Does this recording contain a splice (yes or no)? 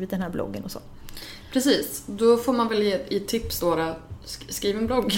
no